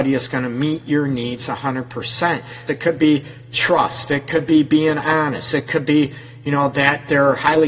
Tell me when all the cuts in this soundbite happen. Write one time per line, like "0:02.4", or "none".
0:02.7